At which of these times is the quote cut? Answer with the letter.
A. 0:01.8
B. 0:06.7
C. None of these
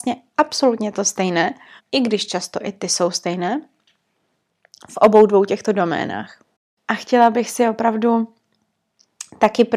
A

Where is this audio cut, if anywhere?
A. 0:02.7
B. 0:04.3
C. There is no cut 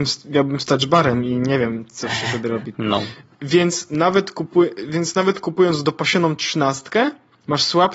A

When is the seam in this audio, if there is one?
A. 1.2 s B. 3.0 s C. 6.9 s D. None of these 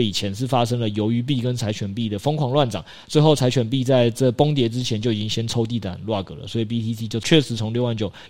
D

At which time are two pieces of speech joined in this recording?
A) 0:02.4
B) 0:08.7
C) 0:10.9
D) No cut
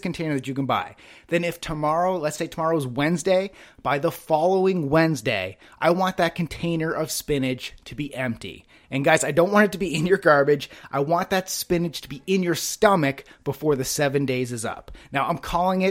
A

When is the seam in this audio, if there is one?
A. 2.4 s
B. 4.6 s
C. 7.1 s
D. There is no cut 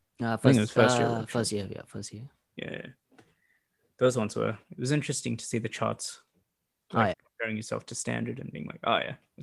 C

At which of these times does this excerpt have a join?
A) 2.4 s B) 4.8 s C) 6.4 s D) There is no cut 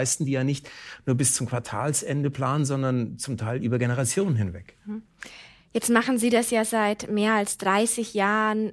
D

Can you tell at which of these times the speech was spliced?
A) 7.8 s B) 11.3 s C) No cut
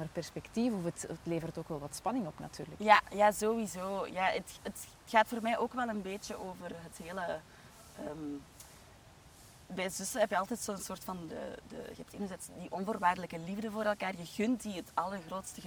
B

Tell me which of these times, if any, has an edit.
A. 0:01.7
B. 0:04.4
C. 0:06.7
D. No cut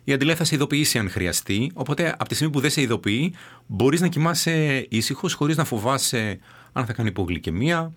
D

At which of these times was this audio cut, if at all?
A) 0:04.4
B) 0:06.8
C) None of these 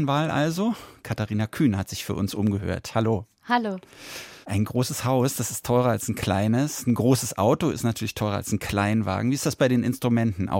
A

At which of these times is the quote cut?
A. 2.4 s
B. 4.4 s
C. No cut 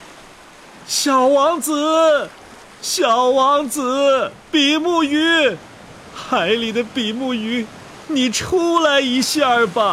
B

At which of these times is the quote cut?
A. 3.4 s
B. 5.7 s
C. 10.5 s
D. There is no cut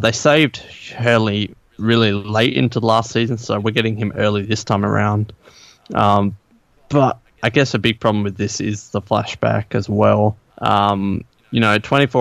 C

